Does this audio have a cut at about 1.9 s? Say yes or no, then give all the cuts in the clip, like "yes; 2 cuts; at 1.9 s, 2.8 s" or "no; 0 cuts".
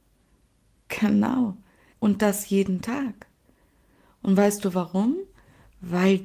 yes; 1 cut; at 1.9 s